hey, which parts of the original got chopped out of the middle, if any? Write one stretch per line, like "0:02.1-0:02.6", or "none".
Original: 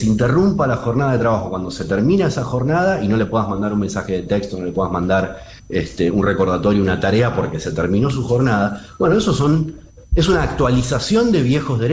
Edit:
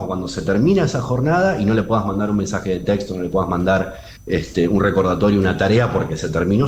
none